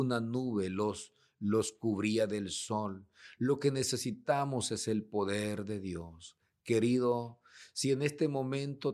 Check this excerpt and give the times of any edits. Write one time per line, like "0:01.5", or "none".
none